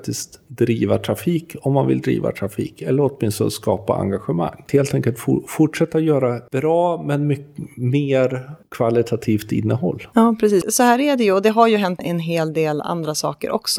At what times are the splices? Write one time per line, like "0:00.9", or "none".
0:10.6
0:12.0